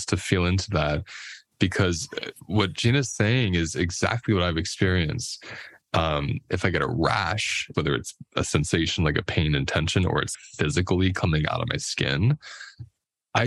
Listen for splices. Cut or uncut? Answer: cut